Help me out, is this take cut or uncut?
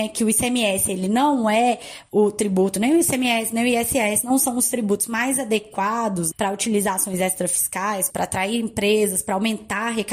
cut